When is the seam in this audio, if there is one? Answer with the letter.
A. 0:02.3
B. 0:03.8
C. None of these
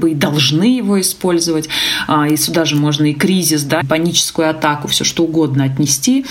B